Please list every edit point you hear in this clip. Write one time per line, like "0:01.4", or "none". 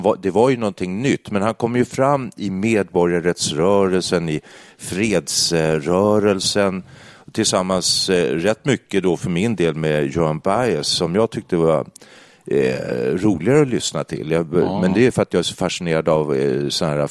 none